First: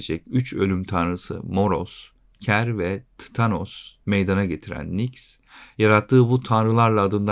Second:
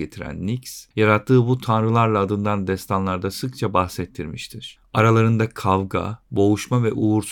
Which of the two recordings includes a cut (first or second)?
second